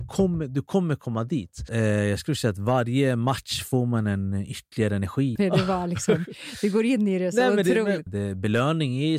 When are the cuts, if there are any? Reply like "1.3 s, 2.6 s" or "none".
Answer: 1.7 s, 5.4 s, 8.1 s

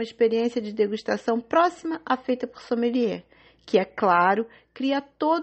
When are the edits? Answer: none

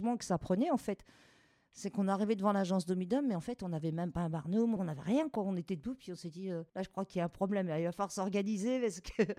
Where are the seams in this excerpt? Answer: 4.8 s, 6.7 s

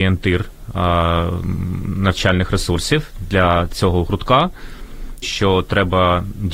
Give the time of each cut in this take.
5.2 s

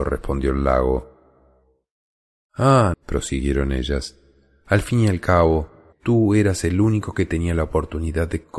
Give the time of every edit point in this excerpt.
2.9 s, 5.9 s

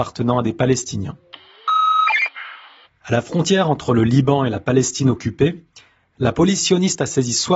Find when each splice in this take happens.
2.8 s

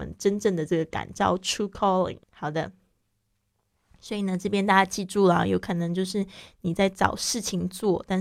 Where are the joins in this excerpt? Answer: 2.2 s

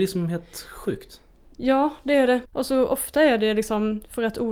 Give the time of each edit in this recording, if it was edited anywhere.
2.4 s

